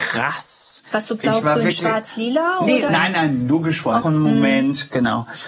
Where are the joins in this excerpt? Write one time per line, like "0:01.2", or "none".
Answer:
0:02.9
0:04.0